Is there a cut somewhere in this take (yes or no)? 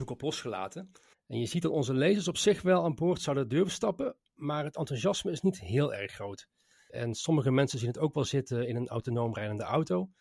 yes